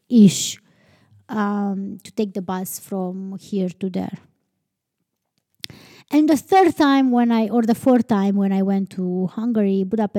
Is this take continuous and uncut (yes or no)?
yes